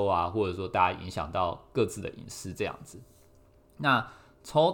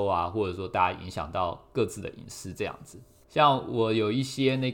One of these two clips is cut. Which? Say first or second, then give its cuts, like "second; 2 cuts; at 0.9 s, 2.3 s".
second; 1 cut; at 3.2 s